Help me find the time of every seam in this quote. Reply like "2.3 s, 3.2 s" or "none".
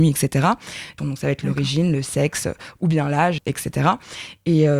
1.0 s, 3.4 s